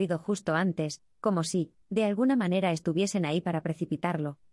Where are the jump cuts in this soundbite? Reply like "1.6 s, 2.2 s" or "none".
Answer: 1.8 s